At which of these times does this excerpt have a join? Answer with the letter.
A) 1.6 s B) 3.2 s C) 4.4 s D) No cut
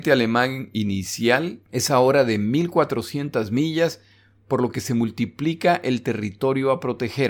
A